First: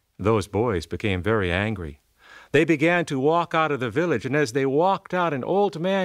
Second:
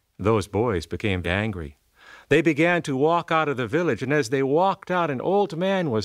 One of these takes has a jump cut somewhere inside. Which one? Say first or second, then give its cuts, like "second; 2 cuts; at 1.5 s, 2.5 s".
second; 1 cut; at 1.2 s